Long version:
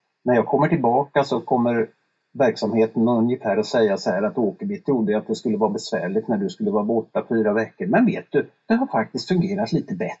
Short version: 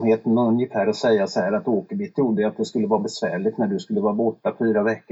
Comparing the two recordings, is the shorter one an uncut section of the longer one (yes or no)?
yes